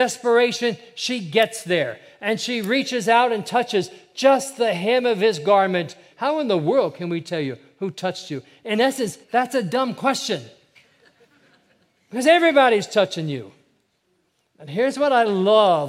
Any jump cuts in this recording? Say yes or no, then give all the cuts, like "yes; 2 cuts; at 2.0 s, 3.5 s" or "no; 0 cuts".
yes; 2 cuts; at 6.1 s, 9.2 s